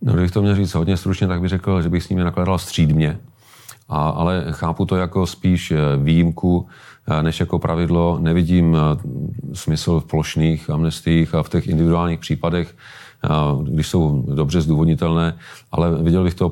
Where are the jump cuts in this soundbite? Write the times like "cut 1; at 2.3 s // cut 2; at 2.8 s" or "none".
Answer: none